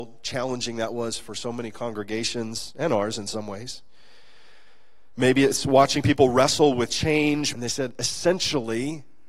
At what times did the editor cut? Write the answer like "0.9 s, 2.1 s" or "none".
7.5 s